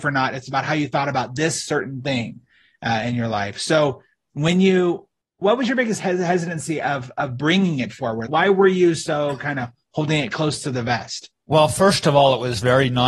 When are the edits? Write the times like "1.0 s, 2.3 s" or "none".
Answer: 8.3 s